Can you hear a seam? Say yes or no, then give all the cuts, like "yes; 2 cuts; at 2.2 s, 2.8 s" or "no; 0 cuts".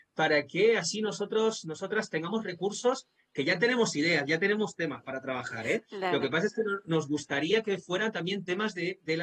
no; 0 cuts